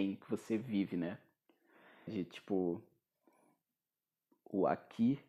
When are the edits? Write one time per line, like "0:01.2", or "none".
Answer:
0:02.1